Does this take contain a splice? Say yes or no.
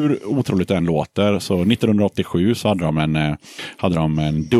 no